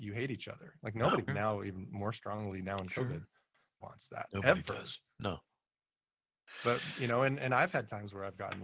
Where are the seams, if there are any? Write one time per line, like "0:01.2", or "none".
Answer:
0:01.3
0:03.8